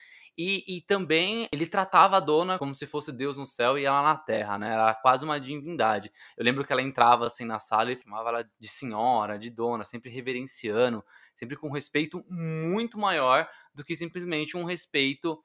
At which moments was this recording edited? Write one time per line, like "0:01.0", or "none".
none